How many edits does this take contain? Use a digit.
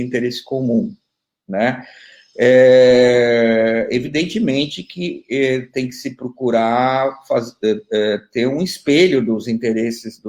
0